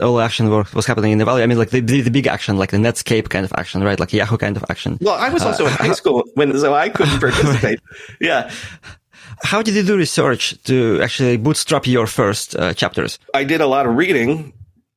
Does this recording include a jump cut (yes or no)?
yes